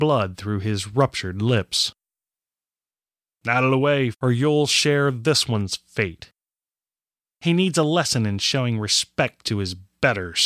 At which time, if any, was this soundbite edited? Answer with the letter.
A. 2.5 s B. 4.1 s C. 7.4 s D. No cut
B